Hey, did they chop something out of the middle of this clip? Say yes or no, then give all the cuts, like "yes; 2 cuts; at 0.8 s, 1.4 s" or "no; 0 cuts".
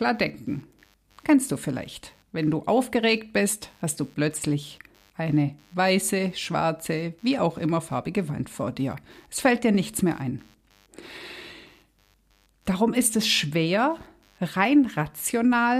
no; 0 cuts